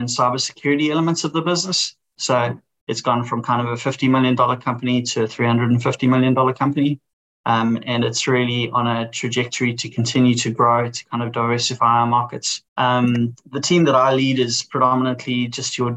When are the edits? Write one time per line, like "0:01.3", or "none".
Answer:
0:02.2
0:12.7